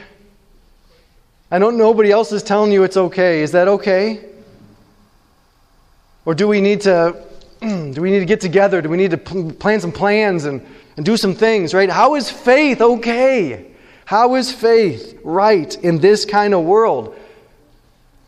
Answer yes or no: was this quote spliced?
yes